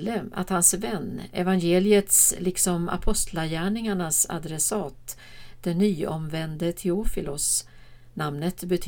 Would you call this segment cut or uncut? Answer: uncut